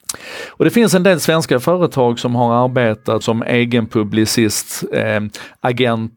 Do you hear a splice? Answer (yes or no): yes